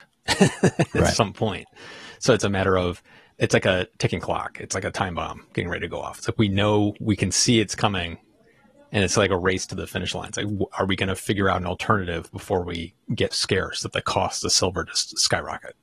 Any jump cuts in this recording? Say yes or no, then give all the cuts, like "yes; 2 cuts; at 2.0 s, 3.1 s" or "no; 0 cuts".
yes; 1 cut; at 13.3 s